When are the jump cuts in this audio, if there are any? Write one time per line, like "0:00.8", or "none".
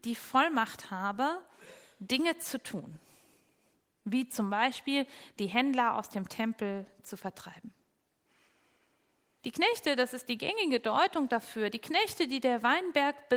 0:09.4